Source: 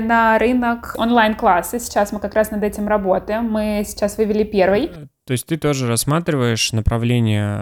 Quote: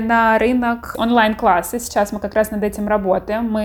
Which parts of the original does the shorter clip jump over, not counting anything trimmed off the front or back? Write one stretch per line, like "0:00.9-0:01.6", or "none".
none